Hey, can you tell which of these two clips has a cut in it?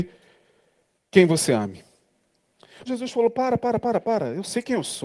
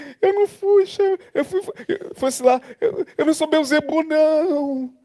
first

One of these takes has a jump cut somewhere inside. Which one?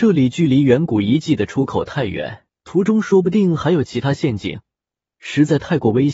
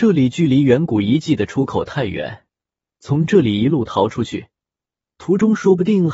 first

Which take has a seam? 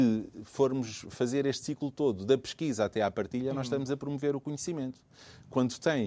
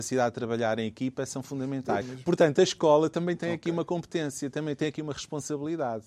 second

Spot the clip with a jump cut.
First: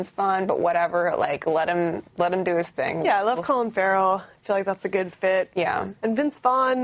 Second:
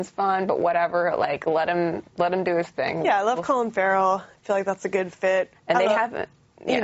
second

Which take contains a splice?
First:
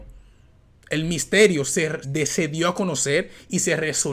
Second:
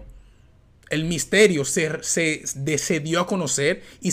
first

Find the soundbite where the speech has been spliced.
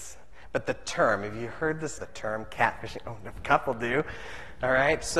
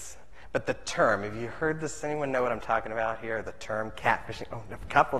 first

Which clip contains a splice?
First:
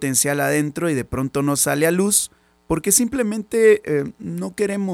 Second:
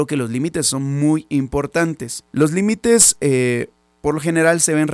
second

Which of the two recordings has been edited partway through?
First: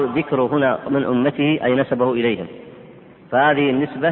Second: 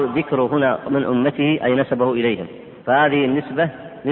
second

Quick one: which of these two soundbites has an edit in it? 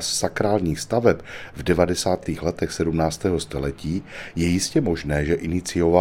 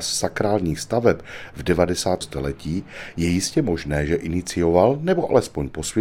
second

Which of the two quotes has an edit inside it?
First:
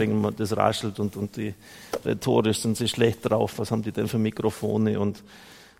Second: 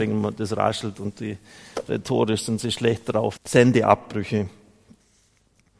second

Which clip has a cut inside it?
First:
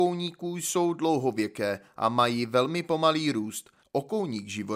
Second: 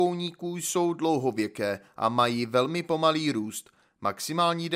first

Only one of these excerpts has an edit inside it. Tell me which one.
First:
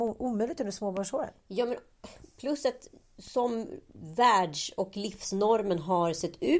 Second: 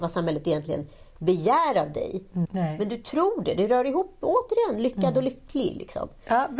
second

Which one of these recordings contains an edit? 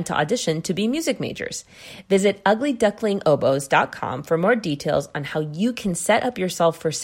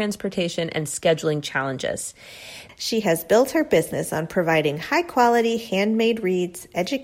second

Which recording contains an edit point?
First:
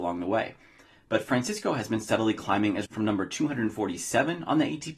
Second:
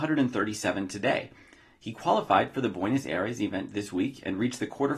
first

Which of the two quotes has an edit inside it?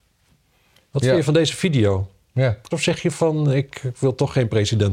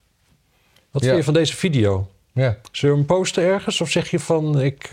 first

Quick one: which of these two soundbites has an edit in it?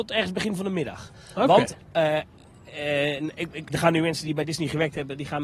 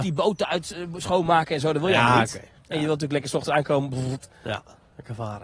first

